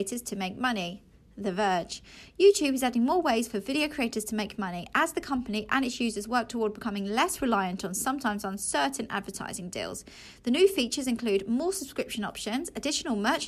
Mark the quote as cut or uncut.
uncut